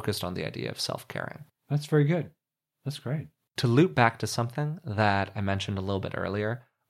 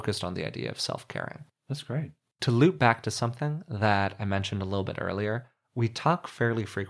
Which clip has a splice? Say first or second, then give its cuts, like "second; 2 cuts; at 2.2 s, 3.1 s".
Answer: second; 1 cut; at 1.6 s